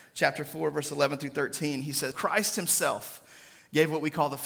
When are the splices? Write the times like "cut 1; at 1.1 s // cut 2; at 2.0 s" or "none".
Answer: cut 1; at 2.1 s

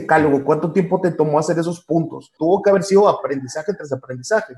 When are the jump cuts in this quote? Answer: cut 1; at 2.4 s

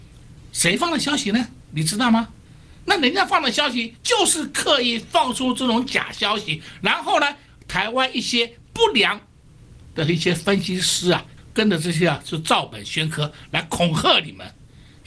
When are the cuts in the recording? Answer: cut 1; at 11.4 s

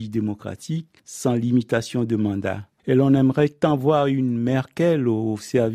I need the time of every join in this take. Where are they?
cut 1; at 2.8 s

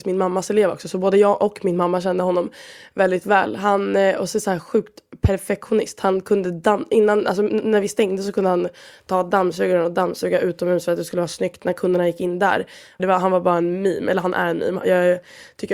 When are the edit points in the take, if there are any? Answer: cut 1; at 13.0 s

